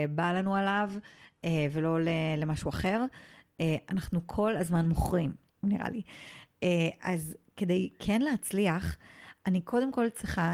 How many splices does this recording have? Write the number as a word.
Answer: one